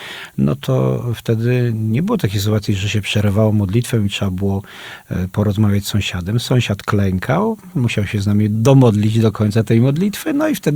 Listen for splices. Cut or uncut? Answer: uncut